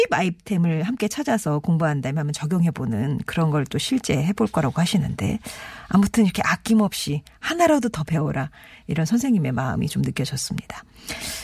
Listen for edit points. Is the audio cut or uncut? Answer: uncut